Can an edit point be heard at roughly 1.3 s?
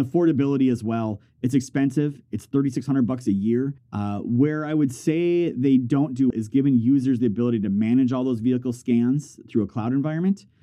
no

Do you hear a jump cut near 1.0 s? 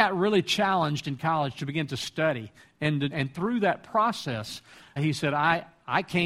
no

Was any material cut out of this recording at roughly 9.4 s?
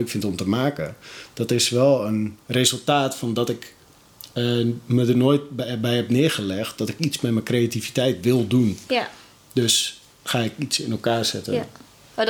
no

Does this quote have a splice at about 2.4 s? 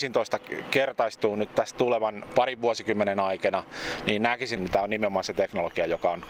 no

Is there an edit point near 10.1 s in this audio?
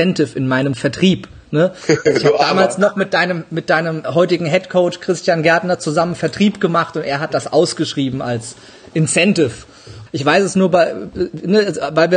yes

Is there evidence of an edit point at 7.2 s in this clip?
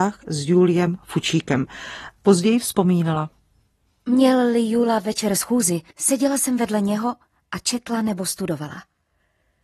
no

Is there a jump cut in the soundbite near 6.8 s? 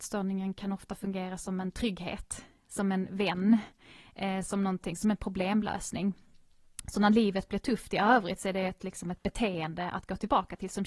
no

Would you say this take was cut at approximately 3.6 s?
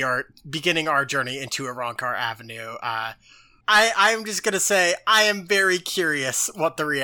yes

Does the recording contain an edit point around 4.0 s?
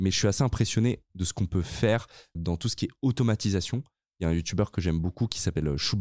no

